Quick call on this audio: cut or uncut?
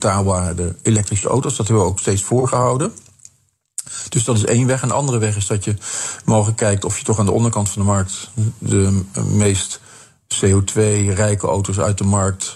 uncut